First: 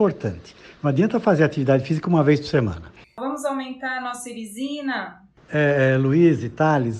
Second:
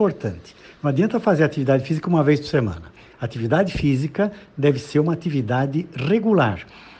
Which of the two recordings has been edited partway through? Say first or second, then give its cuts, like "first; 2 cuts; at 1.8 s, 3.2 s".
first; 2 cuts; at 3.0 s, 5.4 s